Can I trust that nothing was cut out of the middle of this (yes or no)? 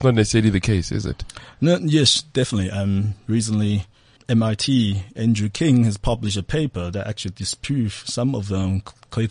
no